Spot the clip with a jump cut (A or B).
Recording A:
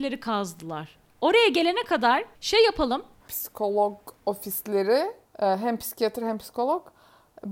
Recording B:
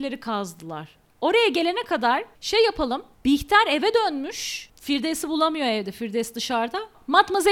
A